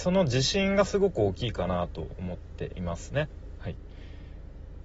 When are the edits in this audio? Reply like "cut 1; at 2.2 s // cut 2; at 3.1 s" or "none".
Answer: cut 1; at 3.6 s